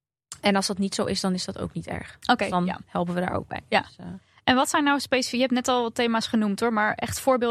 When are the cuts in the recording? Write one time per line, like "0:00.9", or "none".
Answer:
none